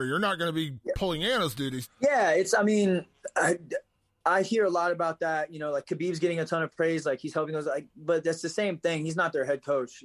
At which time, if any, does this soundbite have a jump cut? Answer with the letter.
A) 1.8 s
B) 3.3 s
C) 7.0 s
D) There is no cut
A